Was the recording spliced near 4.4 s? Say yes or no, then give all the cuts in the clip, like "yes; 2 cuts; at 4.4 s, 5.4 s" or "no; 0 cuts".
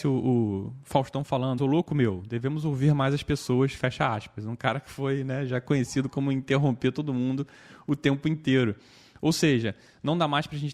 no; 1 cut; at 1.6 s